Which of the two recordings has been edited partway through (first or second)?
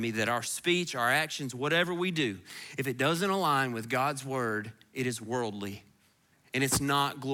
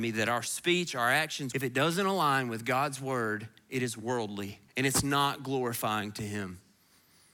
second